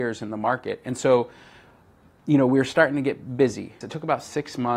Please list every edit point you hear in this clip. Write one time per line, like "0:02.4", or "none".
0:03.8

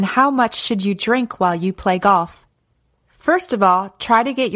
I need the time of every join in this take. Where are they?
none

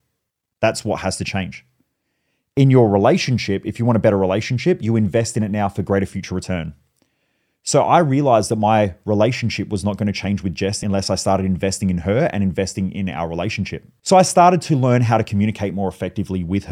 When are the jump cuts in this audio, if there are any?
none

